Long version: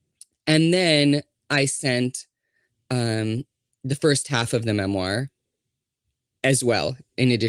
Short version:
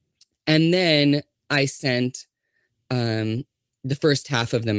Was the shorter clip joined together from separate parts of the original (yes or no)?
no